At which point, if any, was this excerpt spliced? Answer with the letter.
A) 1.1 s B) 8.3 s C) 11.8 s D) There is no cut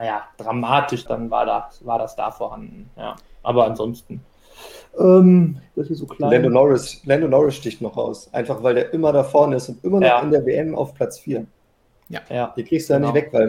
A